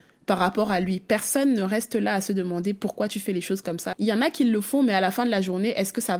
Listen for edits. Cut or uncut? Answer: cut